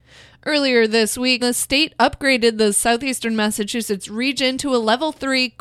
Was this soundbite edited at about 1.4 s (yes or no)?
yes